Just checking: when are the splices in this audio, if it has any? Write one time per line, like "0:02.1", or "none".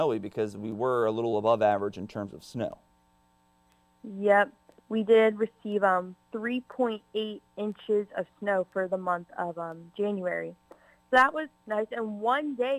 none